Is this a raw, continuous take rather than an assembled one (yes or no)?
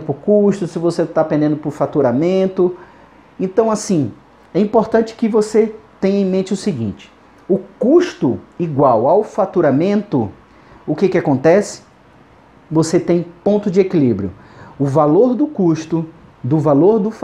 yes